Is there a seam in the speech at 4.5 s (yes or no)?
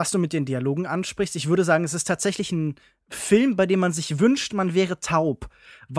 no